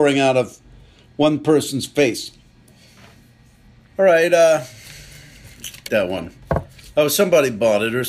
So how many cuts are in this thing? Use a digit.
2